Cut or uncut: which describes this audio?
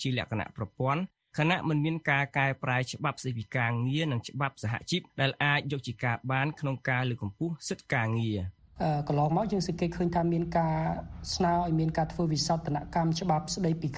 cut